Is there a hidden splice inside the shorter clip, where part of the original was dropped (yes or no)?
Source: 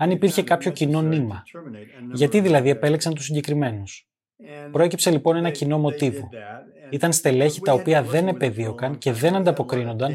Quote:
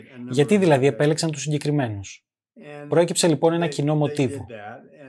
no